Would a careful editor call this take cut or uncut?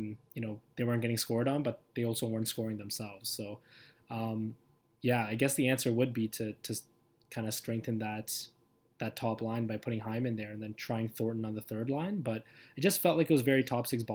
uncut